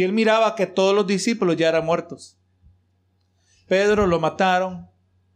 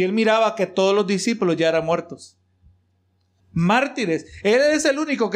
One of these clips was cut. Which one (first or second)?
second